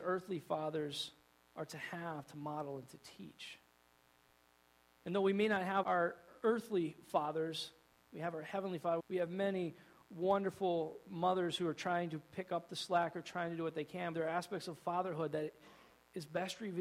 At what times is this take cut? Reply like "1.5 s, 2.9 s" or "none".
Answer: 5.8 s, 9.0 s, 14.1 s